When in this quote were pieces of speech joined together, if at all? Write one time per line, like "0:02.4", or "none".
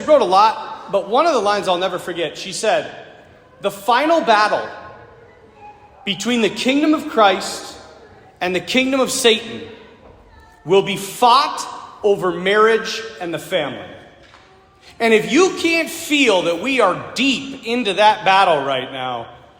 none